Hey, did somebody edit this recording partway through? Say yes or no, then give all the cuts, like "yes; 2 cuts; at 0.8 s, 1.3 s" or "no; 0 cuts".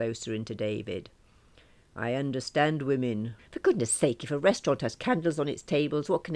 yes; 1 cut; at 3.4 s